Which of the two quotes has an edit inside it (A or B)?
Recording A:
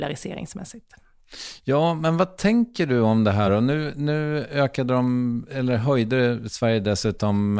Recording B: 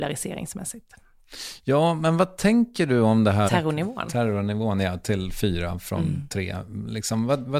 B